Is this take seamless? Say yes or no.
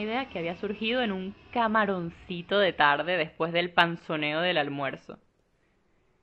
yes